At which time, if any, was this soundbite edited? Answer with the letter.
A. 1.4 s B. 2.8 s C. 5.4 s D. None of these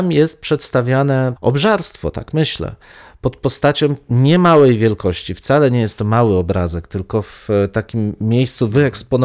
A